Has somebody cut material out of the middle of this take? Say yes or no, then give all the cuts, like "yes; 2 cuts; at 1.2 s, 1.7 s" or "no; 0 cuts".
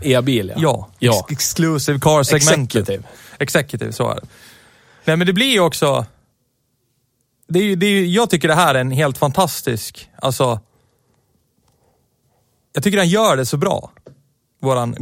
no; 0 cuts